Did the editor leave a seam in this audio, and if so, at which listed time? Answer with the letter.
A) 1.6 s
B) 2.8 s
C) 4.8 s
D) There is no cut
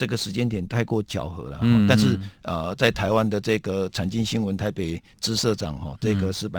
A